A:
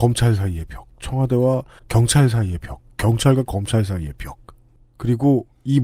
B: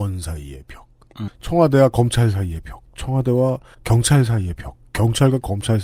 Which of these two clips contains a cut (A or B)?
B